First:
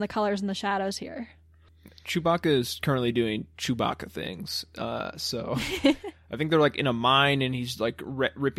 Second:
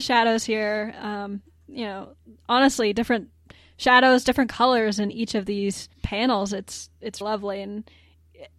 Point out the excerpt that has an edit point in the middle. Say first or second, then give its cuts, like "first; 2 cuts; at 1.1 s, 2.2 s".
second; 2 cuts; at 5.9 s, 7.2 s